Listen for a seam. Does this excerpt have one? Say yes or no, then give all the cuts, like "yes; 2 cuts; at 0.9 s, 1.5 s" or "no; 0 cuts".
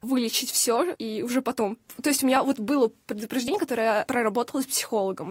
no; 0 cuts